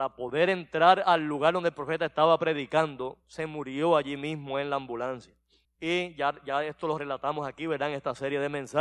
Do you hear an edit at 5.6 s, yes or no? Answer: yes